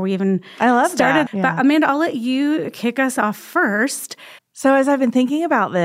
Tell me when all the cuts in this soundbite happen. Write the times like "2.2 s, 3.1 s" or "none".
1.3 s, 4.4 s